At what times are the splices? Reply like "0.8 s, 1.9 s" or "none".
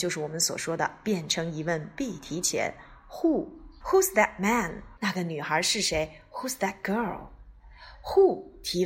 3.8 s, 5.0 s